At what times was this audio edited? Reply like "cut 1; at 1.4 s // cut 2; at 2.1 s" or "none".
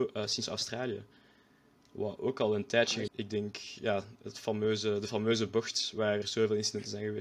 cut 1; at 3.1 s // cut 2; at 6.2 s